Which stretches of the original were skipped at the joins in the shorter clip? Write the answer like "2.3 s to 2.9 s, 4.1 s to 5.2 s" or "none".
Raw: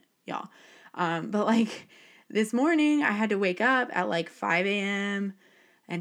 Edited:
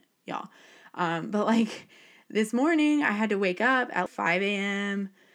4.1 s to 4.3 s